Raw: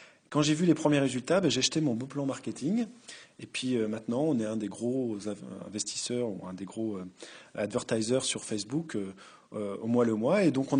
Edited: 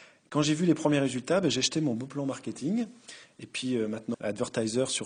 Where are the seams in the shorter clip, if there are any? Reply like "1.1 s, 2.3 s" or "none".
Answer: 4.1 s